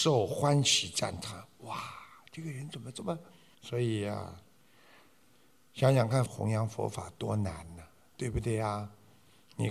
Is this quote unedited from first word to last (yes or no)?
no